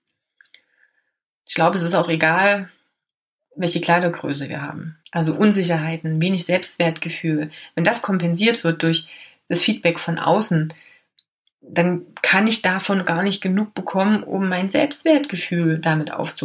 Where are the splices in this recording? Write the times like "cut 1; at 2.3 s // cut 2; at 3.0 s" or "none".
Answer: cut 1; at 5.0 s